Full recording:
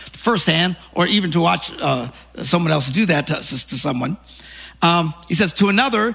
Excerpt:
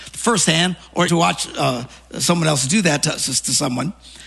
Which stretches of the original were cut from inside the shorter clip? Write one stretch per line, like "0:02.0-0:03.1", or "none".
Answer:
0:01.1-0:01.3